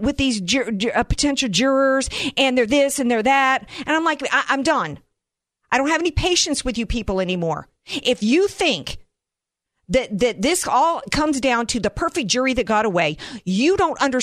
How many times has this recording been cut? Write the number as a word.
zero